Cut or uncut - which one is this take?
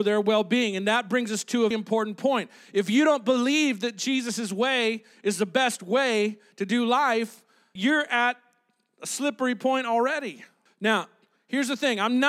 cut